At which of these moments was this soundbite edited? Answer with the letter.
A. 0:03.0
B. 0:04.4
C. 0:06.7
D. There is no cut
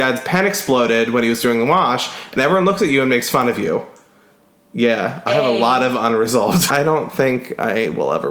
C